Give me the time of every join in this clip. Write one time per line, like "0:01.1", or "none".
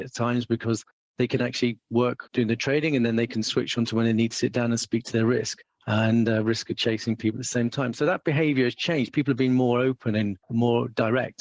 none